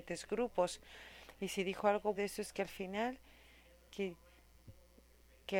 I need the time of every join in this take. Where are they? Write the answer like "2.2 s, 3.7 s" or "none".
2.2 s